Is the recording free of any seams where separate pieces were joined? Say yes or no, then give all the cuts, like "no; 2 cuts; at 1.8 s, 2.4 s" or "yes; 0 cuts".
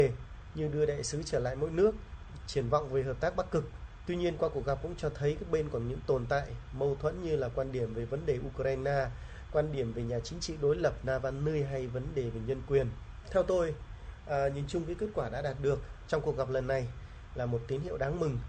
yes; 0 cuts